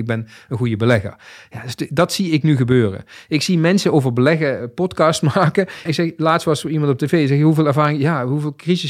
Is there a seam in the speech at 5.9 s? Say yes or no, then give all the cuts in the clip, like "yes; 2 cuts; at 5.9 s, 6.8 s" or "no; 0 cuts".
yes; 1 cut; at 5.9 s